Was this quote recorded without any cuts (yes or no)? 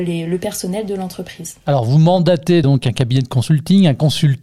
yes